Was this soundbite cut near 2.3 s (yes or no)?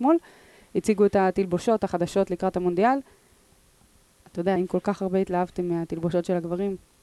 no